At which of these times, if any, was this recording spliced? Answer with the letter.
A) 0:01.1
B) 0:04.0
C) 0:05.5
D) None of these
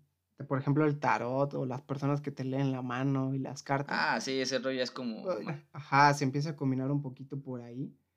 C